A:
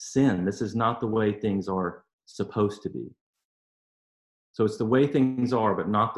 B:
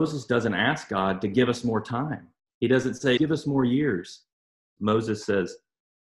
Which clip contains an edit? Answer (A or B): B